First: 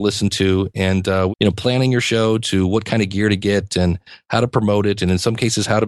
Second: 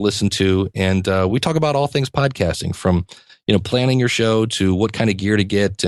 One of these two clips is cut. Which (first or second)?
first